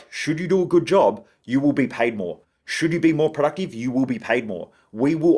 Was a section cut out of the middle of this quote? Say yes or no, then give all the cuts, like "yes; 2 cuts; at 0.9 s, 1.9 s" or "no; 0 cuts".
no; 0 cuts